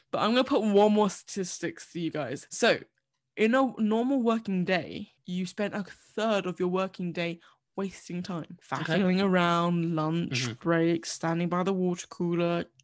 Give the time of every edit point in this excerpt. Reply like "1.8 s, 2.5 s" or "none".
none

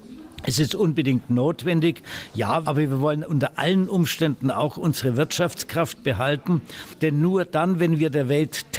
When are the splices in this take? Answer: 2.6 s

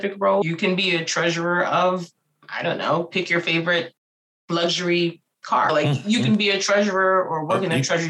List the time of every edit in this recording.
none

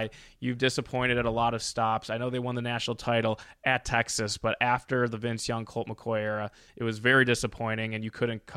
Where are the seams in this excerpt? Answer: none

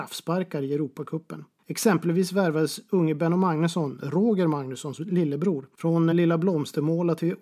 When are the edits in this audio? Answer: 1.6 s, 6.1 s

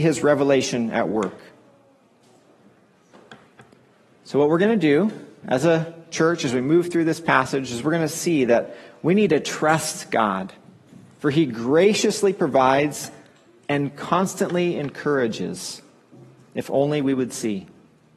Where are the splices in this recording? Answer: none

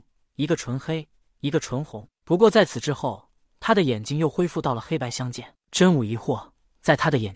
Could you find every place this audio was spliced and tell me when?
5.6 s

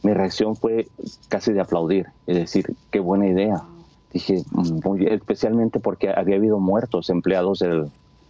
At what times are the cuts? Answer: 3.9 s

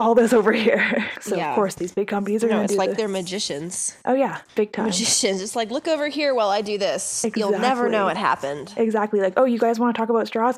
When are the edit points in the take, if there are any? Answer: 1.2 s

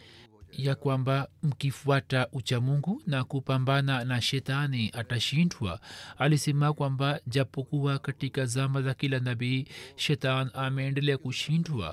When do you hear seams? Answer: 4.2 s

